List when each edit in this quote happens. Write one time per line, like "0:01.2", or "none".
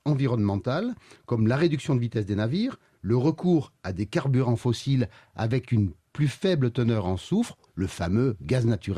0:02.9
0:07.7